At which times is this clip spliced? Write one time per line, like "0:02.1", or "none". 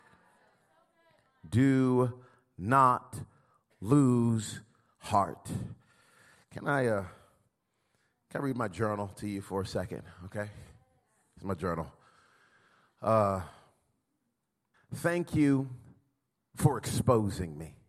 0:14.7